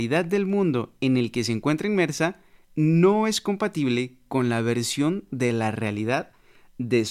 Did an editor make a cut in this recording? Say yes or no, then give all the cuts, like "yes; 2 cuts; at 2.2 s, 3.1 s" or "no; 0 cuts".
no; 0 cuts